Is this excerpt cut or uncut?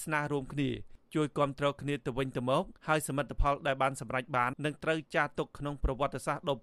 cut